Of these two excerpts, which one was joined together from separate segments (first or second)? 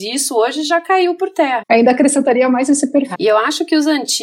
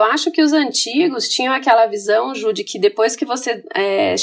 first